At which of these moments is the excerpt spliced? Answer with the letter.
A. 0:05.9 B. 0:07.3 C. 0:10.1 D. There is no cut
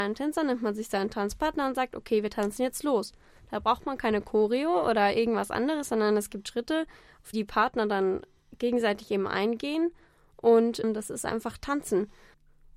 B